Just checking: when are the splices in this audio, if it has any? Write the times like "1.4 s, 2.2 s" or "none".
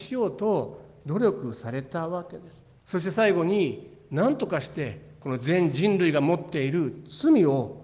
2.8 s